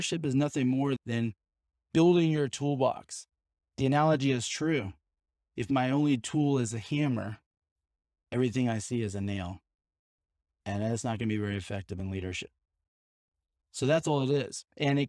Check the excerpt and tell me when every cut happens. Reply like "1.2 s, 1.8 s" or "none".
none